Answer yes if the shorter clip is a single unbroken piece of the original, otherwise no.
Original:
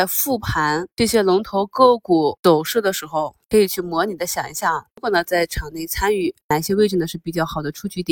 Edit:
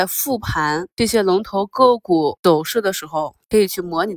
yes